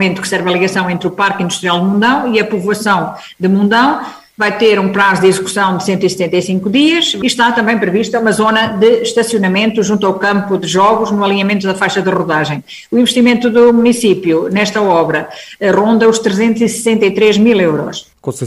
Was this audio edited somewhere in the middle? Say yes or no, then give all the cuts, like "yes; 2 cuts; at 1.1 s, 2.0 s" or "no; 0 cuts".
no; 0 cuts